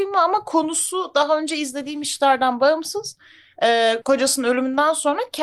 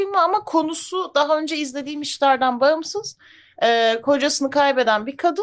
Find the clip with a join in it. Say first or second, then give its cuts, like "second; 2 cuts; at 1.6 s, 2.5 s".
first; 1 cut; at 4.0 s